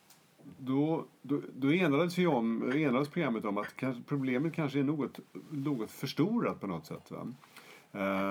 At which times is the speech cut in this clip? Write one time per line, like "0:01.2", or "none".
none

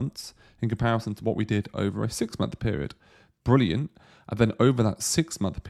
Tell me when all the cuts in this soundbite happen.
0:03.3

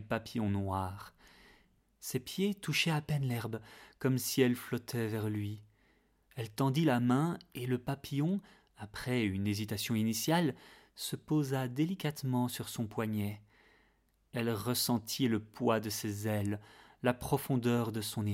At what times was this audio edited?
none

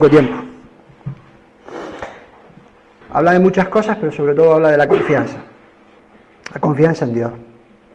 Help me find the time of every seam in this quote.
0:03.0

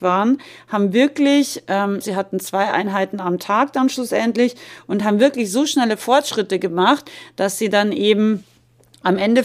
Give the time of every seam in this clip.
0:02.0

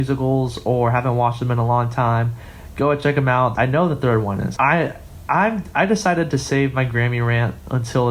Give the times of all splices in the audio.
0:03.5
0:04.6

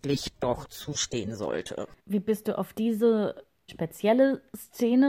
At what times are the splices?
0:02.0
0:03.7

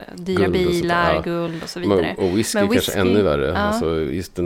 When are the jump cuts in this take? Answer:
none

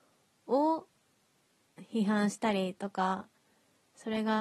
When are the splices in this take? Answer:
none

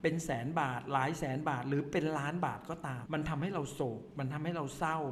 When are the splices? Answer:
0:03.0

